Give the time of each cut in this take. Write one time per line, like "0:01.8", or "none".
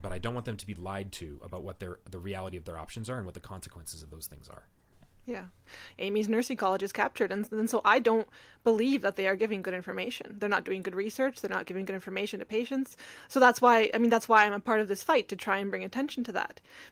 0:05.9